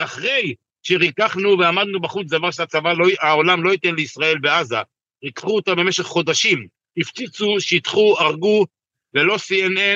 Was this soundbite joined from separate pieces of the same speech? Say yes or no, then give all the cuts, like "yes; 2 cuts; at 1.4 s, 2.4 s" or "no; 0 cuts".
no; 0 cuts